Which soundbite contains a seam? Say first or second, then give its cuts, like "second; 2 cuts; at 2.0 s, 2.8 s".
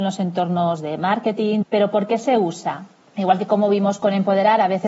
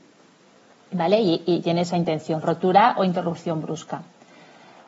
first; 2 cuts; at 1.6 s, 3.0 s